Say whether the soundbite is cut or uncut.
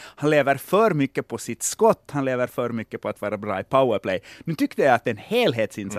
uncut